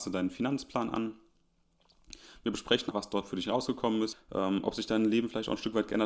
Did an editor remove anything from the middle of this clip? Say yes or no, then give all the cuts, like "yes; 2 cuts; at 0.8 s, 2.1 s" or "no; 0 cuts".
yes; 2 cuts; at 2.9 s, 4.1 s